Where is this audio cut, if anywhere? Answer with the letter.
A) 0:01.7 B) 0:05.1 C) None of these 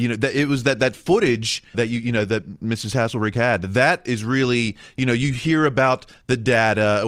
A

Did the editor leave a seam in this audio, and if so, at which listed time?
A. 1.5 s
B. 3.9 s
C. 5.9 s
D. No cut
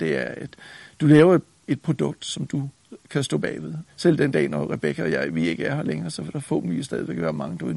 B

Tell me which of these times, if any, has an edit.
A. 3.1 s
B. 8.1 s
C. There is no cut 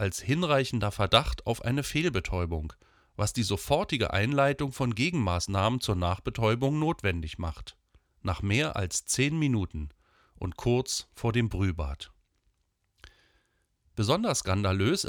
B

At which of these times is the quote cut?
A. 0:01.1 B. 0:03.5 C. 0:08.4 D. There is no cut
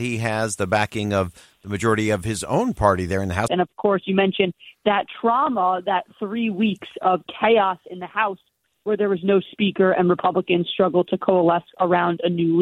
B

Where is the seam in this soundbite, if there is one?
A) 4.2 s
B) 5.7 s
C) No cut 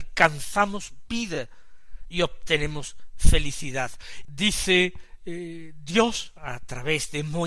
A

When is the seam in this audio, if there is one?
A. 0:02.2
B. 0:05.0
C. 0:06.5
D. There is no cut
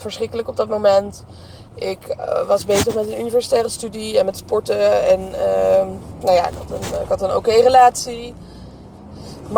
D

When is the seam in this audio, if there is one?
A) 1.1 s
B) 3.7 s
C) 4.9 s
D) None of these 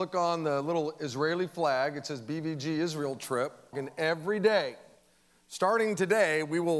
B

